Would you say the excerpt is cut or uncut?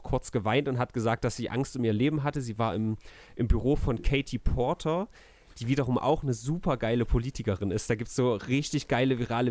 uncut